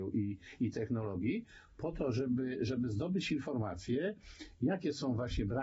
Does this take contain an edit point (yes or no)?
no